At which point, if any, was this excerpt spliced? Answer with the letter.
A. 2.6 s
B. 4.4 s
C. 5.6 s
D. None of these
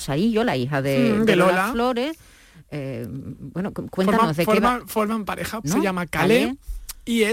C